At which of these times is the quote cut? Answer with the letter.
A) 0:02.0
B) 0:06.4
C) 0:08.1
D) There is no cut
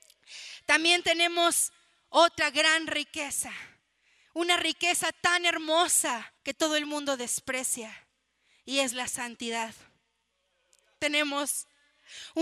B